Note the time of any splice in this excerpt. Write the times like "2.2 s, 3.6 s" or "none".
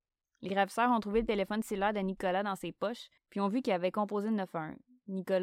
3.2 s